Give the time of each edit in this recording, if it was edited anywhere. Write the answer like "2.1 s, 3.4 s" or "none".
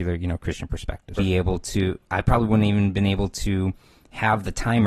1.2 s